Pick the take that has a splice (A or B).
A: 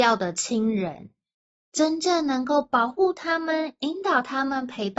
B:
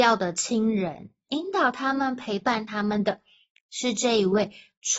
B